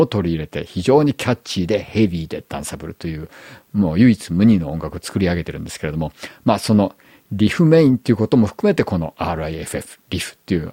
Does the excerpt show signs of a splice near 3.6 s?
no; 0 cuts

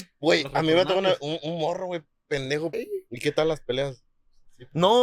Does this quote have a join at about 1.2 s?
no; 1 cut; at 2.7 s

